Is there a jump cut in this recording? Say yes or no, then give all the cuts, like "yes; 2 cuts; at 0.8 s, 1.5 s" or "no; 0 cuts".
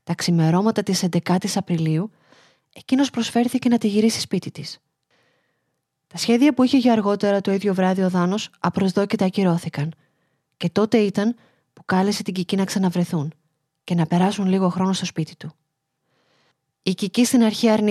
no; 0 cuts